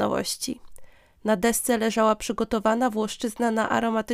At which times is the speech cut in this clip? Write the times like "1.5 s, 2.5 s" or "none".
1.2 s